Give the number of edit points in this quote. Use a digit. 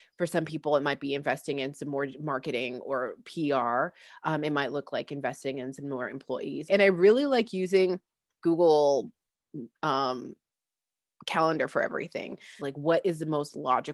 3